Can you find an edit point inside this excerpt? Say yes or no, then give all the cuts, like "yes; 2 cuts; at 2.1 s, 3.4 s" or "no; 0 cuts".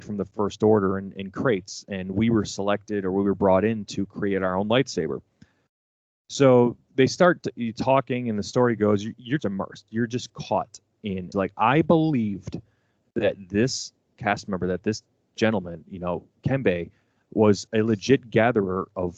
yes; 2 cuts; at 9.4 s, 11.3 s